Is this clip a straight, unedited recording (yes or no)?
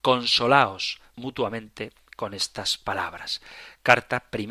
no